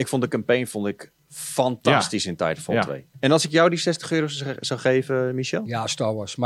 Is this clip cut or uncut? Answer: cut